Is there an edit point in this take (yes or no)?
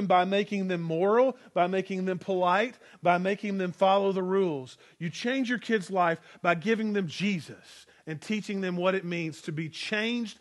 no